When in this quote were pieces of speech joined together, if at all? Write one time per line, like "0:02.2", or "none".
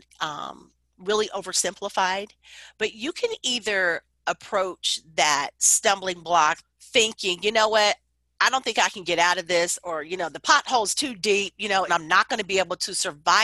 0:06.6
0:11.9